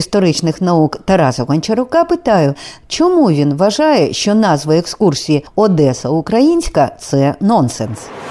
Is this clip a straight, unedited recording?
yes; 0 cuts

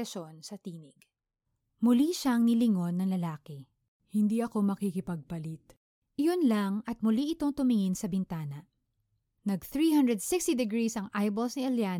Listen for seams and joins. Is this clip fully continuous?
yes; 0 cuts

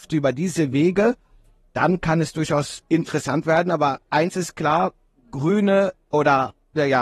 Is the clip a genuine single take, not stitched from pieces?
yes; 0 cuts

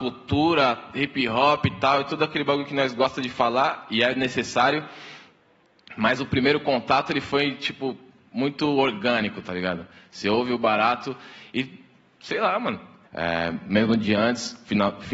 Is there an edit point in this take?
yes; 1 cut; at 13.0 s

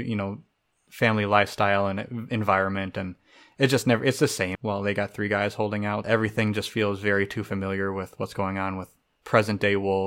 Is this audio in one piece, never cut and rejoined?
no; 2 cuts; at 4.5 s, 6.0 s

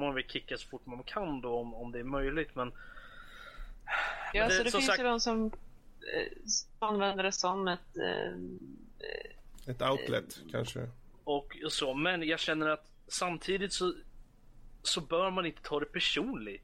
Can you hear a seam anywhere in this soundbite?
yes; 1 cut; at 11.2 s

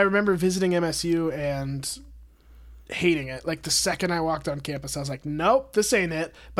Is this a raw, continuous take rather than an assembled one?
yes; 0 cuts

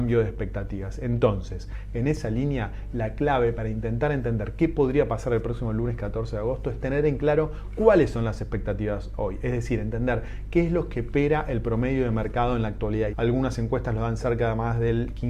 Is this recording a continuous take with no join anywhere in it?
no; 1 cut; at 13.1 s

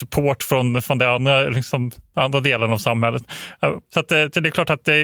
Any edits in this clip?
yes; 1 cut; at 3.8 s

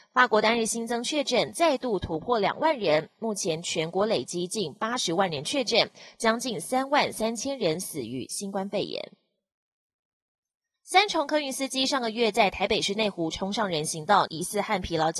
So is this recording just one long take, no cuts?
no; 2 cuts; at 10.8 s, 14.3 s

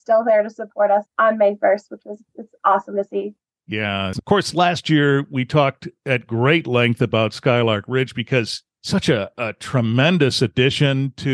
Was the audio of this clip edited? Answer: yes; 2 cuts; at 1.1 s, 8.7 s

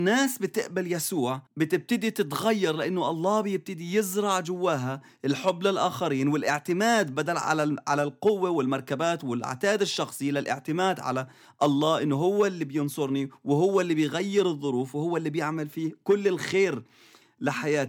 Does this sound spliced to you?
yes; 1 cut; at 1.5 s

